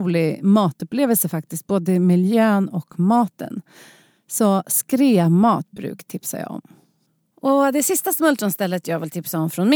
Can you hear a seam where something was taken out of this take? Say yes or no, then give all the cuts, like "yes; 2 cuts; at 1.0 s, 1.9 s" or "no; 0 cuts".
no; 0 cuts